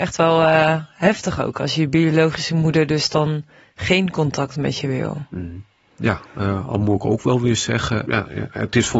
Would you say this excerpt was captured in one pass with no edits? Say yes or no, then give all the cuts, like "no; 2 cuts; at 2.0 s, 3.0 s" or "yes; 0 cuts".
no; 1 cut; at 8.0 s